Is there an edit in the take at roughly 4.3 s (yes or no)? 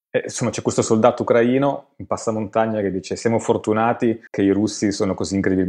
yes